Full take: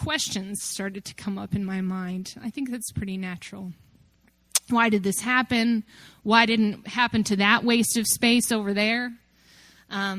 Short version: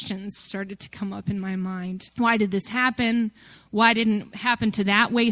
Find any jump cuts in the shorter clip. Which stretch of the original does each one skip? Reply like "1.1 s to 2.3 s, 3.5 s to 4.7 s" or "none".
2.3 s to 4.6 s